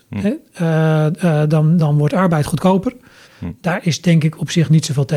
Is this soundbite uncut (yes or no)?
no